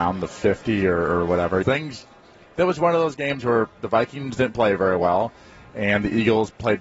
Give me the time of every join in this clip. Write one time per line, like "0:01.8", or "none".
0:01.6